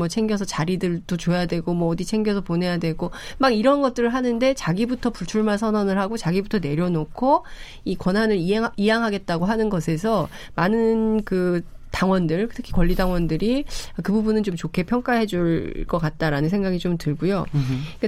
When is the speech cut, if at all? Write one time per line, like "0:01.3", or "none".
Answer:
none